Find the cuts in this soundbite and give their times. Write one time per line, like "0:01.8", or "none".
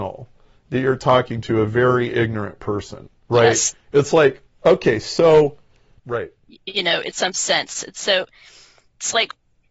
0:03.2
0:06.0